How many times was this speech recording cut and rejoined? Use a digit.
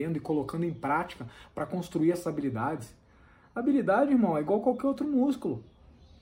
0